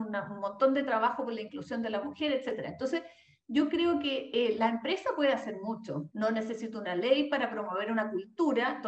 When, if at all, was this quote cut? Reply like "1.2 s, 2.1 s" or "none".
6.1 s

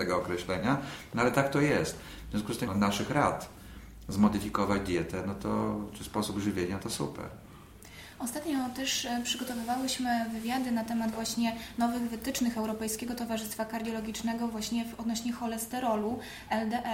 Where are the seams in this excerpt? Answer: 2.7 s

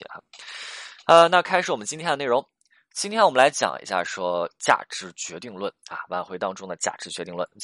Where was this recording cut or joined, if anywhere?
none

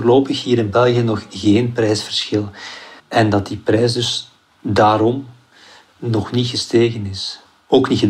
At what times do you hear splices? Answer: 3.0 s

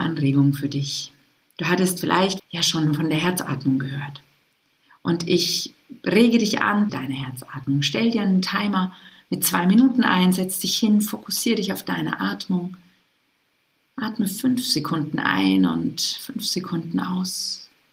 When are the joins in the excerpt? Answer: 2.4 s, 6.9 s

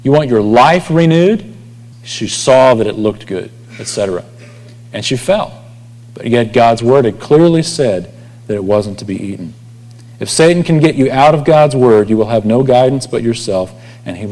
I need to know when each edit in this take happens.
1.9 s

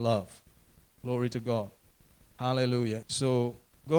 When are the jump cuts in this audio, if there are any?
3.0 s

